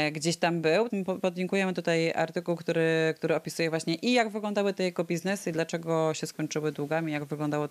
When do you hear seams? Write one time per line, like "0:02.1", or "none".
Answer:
0:00.9